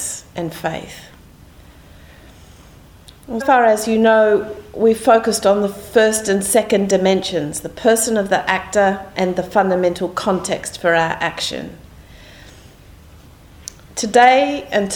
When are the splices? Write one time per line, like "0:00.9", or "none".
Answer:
0:03.4